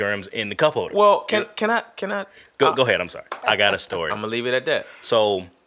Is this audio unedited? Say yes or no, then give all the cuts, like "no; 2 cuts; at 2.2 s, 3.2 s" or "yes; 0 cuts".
no; 1 cut; at 3.4 s